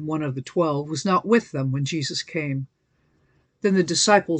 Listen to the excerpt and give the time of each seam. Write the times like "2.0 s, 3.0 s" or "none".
3.4 s